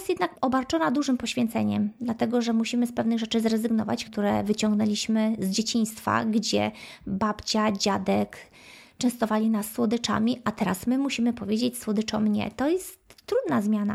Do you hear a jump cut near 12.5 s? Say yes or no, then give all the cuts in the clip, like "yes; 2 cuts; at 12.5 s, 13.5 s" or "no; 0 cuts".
no; 1 cut; at 4.1 s